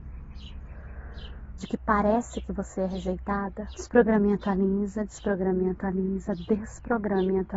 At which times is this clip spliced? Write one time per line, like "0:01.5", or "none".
0:01.6
0:03.7